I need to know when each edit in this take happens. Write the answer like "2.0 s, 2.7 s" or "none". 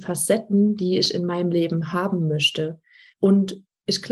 3.1 s